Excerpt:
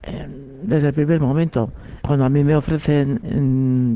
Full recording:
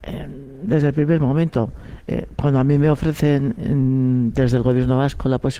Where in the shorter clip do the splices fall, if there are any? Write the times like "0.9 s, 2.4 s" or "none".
2.0 s